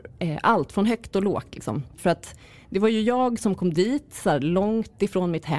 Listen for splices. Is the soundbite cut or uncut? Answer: cut